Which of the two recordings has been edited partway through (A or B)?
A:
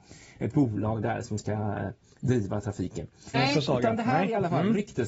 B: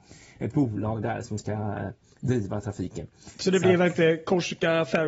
A